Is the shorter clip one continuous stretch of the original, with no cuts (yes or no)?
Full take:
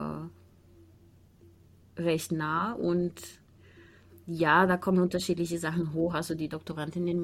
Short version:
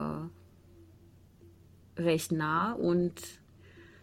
yes